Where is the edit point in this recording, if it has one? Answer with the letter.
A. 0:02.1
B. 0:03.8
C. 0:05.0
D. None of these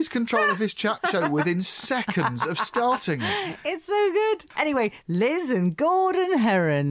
C